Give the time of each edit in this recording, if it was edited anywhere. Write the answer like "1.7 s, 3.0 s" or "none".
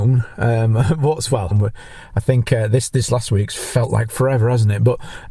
1.5 s